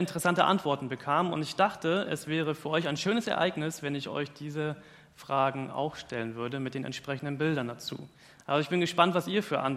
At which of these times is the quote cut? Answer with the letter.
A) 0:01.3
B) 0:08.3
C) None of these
C